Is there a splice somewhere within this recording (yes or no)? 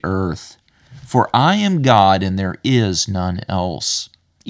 no